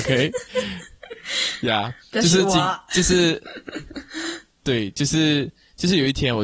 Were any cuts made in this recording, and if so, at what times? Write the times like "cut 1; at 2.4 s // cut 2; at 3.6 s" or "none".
none